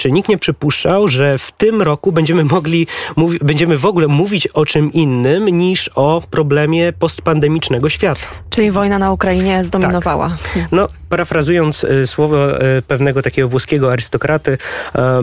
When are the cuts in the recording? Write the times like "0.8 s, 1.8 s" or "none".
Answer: none